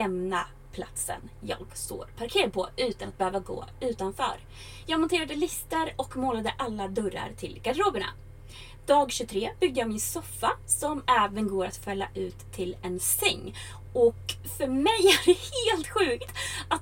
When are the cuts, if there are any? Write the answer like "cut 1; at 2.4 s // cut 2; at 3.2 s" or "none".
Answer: none